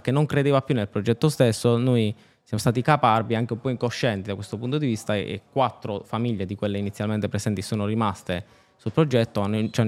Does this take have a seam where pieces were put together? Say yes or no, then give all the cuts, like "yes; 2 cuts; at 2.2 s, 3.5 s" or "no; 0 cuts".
no; 0 cuts